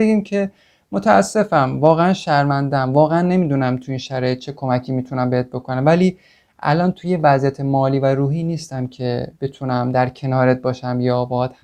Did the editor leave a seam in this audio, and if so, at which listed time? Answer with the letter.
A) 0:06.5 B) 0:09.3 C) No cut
B